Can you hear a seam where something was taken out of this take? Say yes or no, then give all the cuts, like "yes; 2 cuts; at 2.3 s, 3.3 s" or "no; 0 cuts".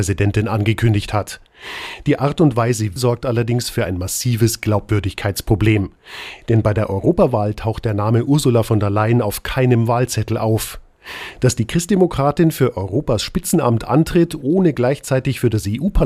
yes; 1 cut; at 3.0 s